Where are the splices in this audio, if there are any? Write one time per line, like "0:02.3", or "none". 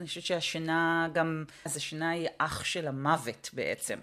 0:01.7